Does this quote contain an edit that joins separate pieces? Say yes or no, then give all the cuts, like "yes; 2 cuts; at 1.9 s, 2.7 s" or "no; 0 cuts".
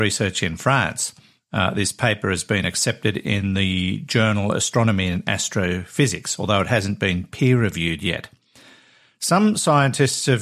no; 0 cuts